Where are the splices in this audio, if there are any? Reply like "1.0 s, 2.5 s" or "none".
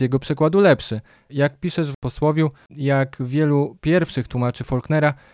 1.3 s, 2.7 s